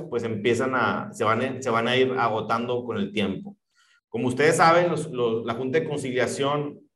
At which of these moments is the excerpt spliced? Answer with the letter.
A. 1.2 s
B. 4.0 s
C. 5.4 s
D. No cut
B